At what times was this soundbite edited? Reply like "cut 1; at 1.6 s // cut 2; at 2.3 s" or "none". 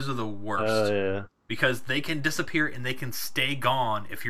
cut 1; at 1.4 s